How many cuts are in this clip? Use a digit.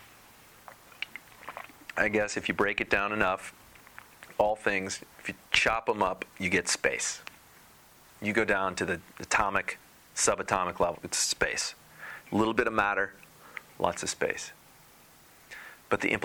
1